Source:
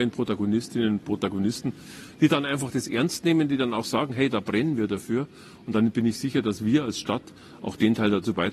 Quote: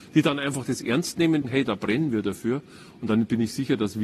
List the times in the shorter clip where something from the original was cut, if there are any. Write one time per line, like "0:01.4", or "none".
0:01.4